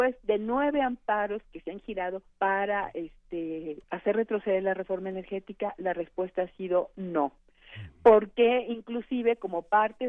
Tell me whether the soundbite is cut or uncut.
cut